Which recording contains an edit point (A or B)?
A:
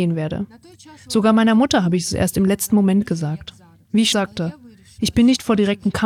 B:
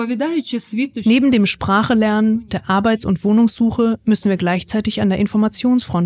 A